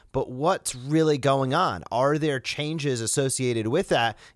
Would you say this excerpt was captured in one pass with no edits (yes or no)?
yes